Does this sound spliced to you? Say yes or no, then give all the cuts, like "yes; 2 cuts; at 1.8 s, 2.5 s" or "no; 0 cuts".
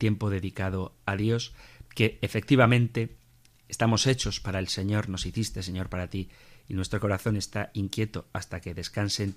no; 0 cuts